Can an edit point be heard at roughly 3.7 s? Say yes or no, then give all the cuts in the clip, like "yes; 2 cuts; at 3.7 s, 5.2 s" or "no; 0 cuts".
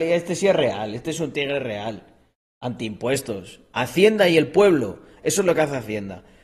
yes; 2 cuts; at 3.7 s, 5.2 s